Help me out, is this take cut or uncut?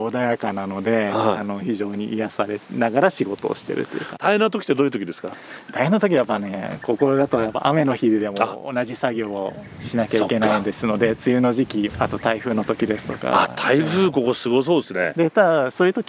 uncut